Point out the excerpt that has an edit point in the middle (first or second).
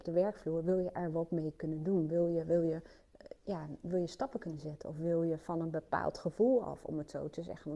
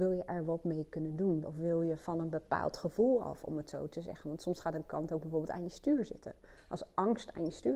second